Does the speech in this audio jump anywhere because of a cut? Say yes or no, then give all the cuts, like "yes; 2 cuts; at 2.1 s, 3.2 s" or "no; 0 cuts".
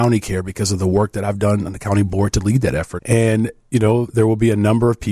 yes; 2 cuts; at 3.0 s, 4.1 s